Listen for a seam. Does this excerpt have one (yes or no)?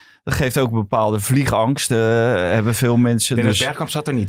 no